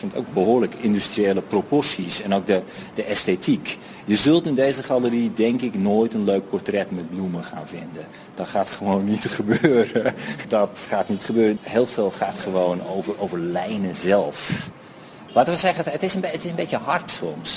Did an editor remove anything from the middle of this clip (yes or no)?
yes